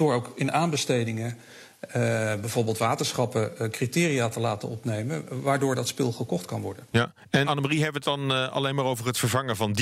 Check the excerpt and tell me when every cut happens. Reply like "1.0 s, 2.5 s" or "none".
7.4 s